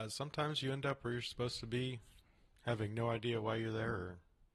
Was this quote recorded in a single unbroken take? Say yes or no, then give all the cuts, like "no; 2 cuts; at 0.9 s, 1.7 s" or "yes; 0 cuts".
yes; 0 cuts